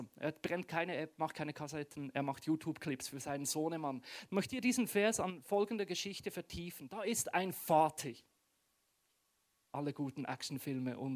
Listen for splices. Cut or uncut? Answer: cut